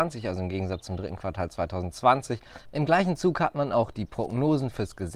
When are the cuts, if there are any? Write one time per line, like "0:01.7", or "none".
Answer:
0:02.6